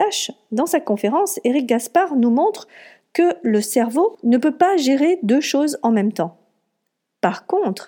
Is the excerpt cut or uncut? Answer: uncut